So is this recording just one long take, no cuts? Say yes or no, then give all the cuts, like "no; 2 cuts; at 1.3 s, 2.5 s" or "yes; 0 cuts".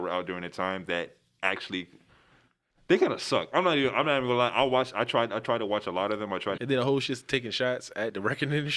no; 1 cut; at 6.6 s